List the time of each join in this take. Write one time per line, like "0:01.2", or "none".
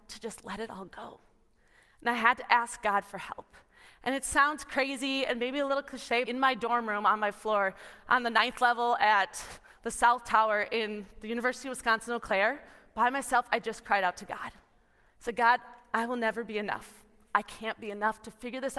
0:06.3